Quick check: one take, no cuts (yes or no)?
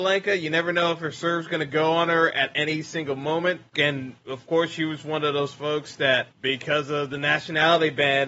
no